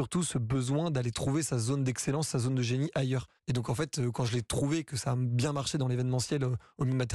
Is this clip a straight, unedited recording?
no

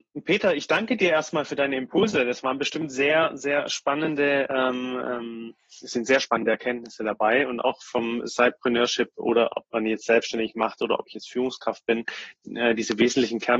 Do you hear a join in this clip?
no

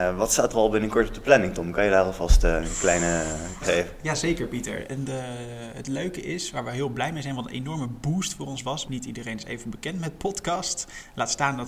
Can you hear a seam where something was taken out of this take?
yes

